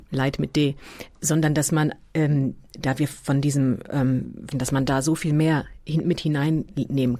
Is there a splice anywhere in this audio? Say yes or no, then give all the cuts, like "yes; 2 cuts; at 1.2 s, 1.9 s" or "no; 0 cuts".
yes; 2 cuts; at 1.1 s, 4.5 s